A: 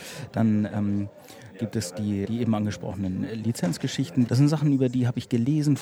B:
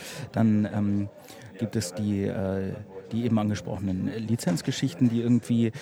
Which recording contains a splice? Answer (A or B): A